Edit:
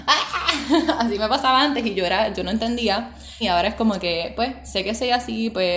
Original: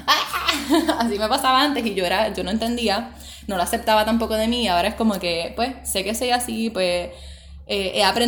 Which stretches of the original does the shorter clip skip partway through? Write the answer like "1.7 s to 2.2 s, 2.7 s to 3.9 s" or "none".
3.4 s to 4.6 s